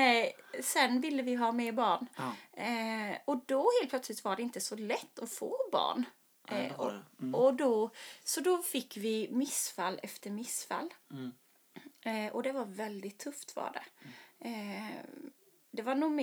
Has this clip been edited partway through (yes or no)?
no